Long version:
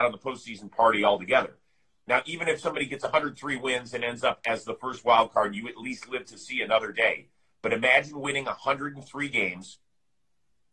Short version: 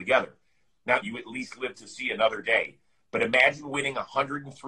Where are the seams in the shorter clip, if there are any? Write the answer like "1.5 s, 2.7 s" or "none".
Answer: 1.0 s